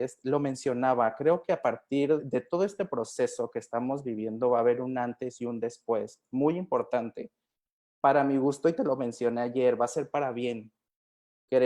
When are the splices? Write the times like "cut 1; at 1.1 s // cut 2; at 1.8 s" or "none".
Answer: cut 1; at 2.2 s